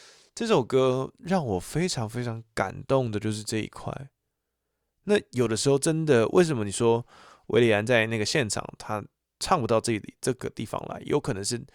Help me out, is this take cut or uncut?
uncut